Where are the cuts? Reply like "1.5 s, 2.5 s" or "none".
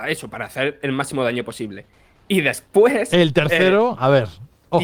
none